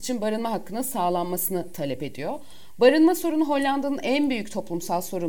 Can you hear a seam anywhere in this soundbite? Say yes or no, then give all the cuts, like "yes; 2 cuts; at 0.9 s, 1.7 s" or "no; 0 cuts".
no; 0 cuts